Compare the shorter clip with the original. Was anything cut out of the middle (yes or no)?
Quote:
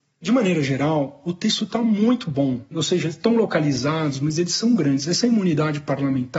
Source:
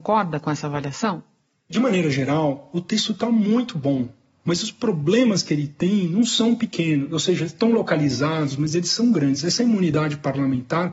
yes